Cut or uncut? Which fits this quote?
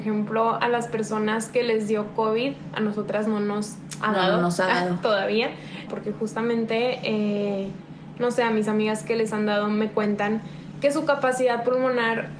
cut